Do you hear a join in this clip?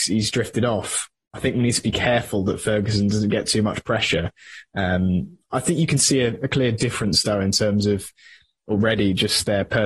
no; 0 cuts

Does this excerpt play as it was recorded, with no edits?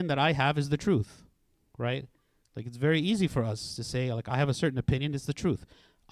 yes; 0 cuts

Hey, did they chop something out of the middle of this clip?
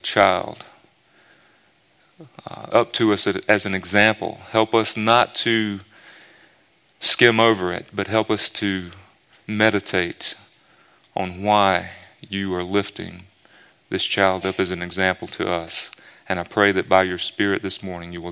yes; 1 cut; at 2.7 s

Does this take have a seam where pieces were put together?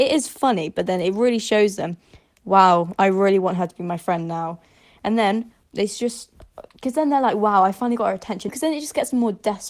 yes; 2 cuts; at 5.6 s, 8.5 s

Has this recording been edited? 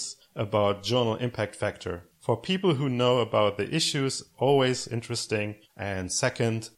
yes; 1 cut; at 5.7 s

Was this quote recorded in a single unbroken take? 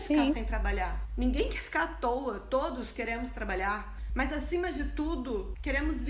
yes; 0 cuts

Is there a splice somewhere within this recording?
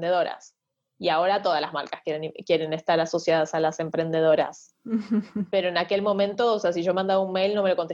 no; 0 cuts

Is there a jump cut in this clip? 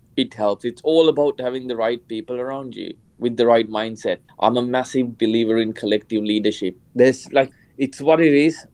yes; 2 cuts; at 4.3 s, 6.9 s

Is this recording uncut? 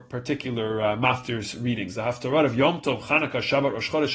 yes; 0 cuts

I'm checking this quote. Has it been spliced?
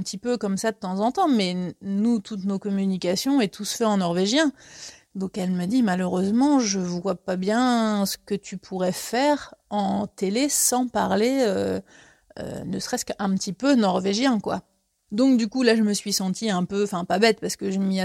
no; 0 cuts

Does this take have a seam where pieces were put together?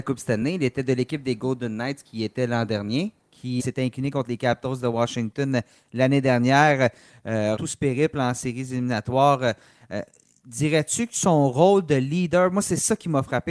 yes; 2 cuts; at 3.6 s, 7.6 s

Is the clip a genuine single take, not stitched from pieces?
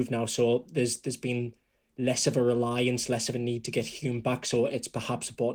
yes; 0 cuts

